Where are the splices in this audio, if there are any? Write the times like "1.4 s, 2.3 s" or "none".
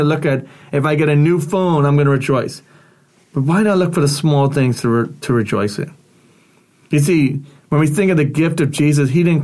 none